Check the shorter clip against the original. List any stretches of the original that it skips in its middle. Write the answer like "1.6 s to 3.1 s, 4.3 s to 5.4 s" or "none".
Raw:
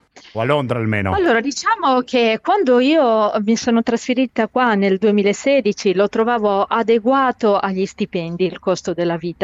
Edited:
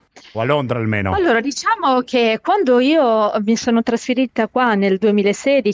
none

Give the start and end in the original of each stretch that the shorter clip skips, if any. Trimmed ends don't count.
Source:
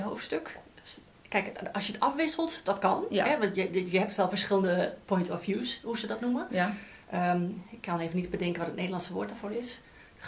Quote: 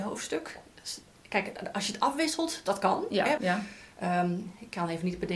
3.4 s to 6.5 s

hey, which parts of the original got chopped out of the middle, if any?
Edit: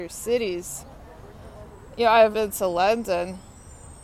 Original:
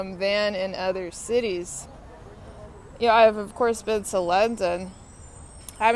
3.3 s to 3.8 s

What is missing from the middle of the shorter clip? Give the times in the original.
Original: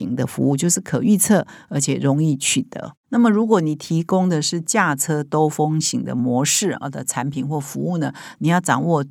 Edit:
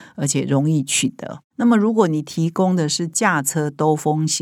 none

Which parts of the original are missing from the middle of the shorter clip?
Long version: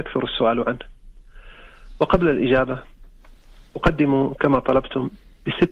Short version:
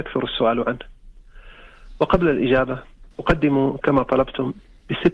3.1 s to 3.7 s

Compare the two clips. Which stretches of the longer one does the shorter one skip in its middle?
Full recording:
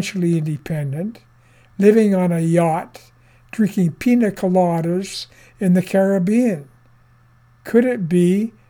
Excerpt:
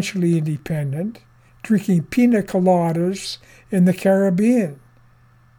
1.5 s to 3.4 s

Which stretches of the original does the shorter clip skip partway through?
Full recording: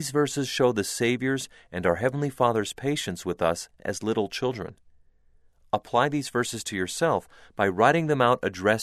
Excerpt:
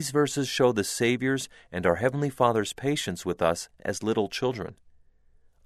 none

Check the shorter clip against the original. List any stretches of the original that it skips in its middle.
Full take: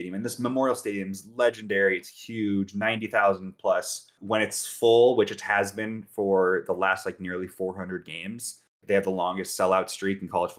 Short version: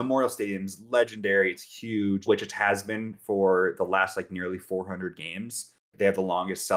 2.7 s to 5.1 s

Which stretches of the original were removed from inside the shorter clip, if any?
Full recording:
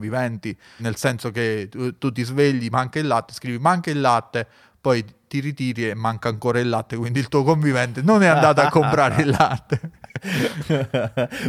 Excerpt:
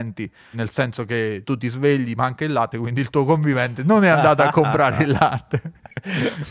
1.7 s to 2.0 s, 3.3 s to 6.9 s

